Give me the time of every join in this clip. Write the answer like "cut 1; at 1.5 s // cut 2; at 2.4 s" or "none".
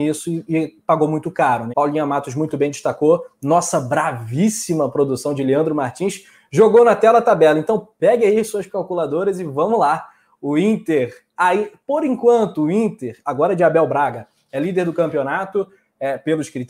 cut 1; at 1.7 s